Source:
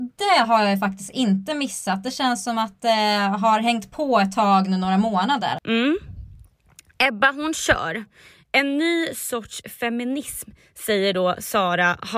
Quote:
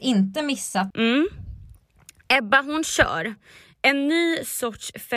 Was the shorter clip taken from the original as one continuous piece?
no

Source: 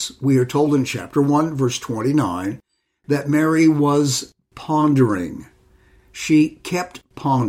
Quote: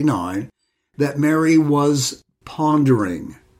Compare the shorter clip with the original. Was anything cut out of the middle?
no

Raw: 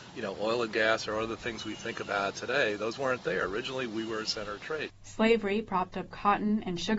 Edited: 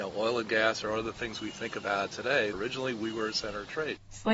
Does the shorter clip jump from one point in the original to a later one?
yes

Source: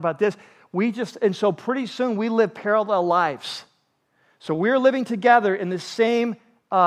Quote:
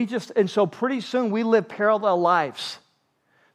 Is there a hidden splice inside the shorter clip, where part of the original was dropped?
no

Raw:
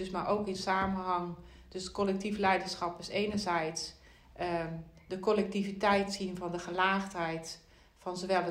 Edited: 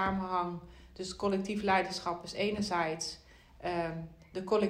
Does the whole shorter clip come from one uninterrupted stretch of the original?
yes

